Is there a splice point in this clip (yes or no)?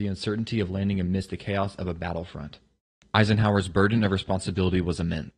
no